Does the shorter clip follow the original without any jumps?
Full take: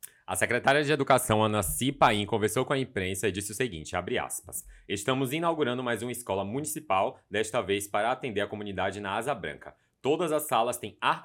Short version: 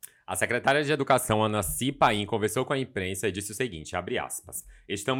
yes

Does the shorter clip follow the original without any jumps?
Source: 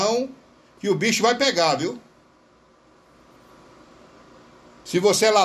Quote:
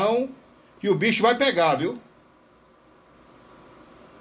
yes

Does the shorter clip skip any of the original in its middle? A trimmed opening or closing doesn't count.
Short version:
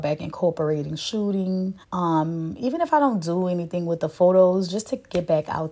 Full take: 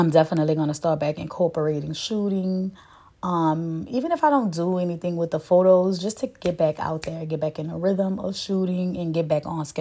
yes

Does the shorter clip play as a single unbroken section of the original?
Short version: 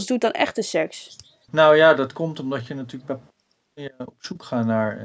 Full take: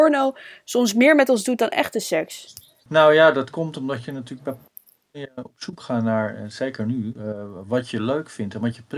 yes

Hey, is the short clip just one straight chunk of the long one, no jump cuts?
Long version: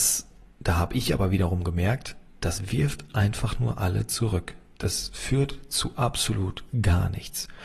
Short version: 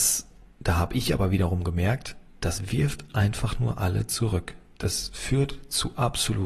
yes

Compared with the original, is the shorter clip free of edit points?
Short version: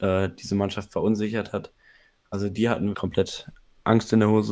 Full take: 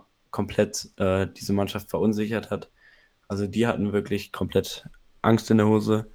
no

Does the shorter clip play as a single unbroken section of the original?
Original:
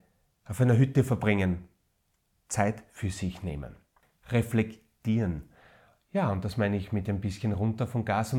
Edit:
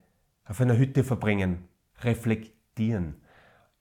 no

